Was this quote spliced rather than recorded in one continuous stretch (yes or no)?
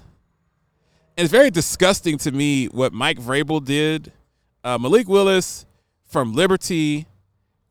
no